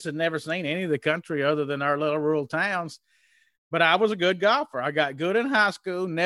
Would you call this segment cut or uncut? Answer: uncut